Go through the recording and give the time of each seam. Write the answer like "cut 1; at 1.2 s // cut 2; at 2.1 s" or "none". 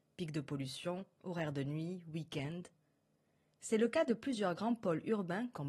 none